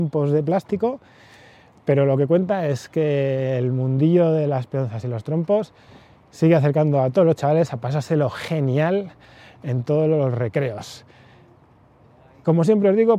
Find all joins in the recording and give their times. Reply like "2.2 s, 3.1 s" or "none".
none